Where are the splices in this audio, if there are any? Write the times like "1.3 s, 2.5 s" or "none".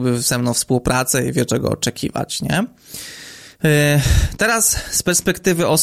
none